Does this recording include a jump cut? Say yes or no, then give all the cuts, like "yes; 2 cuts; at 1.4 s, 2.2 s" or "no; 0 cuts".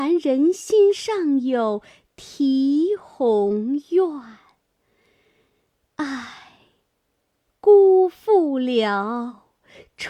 no; 0 cuts